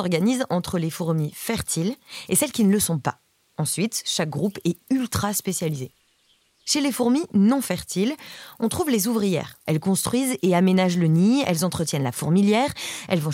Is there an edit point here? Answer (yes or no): yes